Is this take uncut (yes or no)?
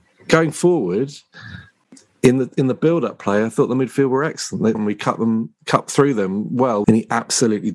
no